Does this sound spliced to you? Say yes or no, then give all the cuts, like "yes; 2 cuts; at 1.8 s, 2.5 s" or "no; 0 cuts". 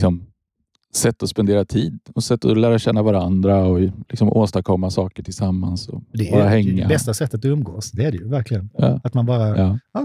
no; 0 cuts